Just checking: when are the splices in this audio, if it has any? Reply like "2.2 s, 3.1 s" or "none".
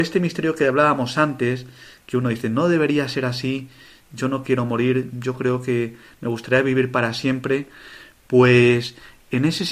none